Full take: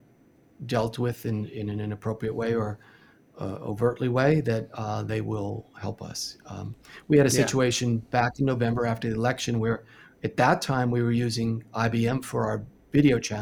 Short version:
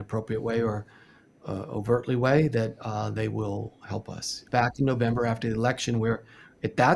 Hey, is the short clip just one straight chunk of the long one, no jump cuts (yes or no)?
no